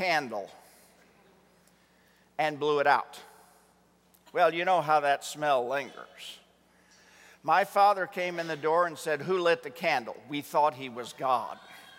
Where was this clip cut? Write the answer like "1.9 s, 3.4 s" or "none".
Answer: none

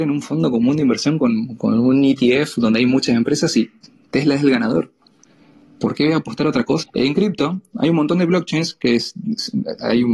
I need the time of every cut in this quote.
6.8 s

